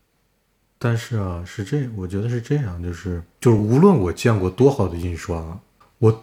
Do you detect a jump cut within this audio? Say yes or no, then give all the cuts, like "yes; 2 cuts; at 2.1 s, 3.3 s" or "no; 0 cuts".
no; 0 cuts